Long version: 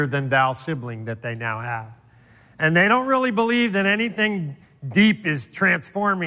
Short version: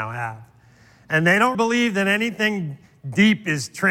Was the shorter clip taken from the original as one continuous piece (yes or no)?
no